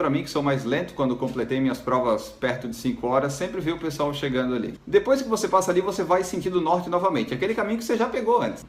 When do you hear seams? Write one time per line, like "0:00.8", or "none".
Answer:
none